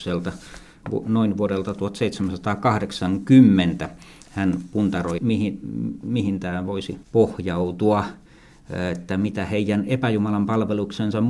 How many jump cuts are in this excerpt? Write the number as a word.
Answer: two